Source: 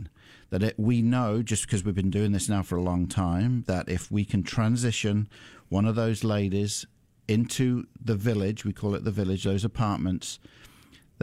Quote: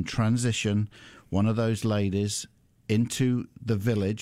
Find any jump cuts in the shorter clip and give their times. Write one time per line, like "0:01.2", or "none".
none